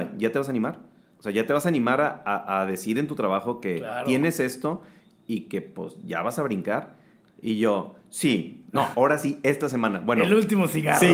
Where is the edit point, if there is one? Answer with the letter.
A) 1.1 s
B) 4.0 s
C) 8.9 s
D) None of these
C